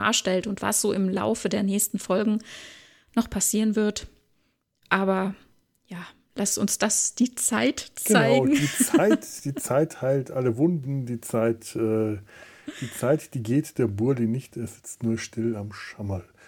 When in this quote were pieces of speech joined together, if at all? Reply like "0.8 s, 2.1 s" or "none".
none